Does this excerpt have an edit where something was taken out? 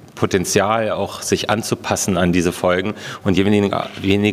no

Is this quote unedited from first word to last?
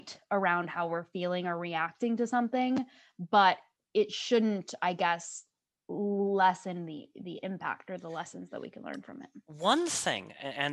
yes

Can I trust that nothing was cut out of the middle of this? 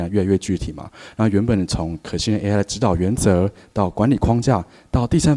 yes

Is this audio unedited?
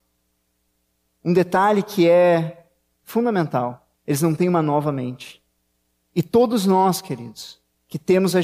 no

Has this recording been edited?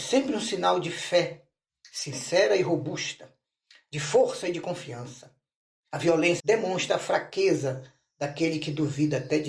yes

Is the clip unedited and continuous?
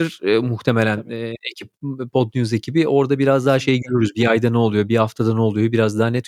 yes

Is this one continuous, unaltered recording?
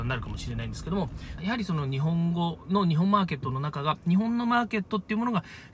no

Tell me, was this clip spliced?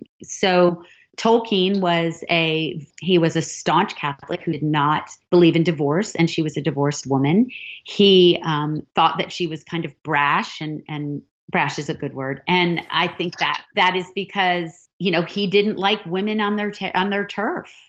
no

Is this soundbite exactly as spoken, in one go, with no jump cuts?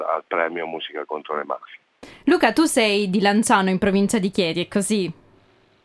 yes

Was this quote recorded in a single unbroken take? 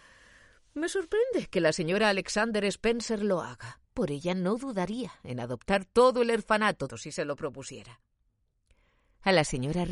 no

